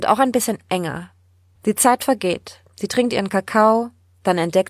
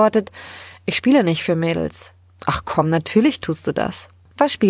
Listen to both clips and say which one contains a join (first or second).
first